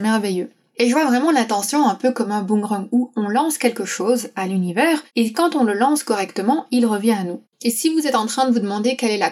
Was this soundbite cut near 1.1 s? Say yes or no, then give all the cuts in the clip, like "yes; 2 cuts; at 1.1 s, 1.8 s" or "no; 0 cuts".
no; 2 cuts; at 5.1 s, 7.4 s